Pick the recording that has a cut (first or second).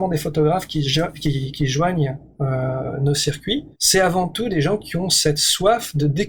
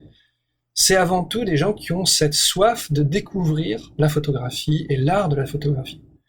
first